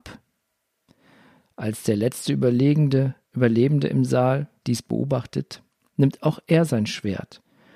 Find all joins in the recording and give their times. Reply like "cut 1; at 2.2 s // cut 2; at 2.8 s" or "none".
cut 1; at 4.6 s

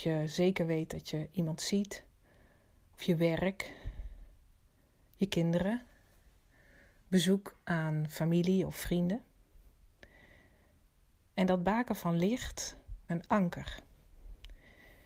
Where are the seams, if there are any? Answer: cut 1; at 13.1 s

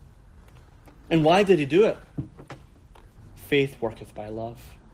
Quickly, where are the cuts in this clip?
cut 1; at 3.2 s

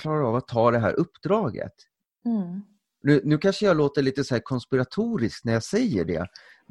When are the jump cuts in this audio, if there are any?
none

